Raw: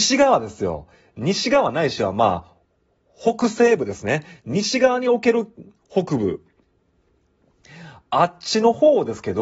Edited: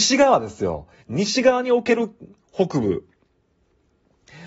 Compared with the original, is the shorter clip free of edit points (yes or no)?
no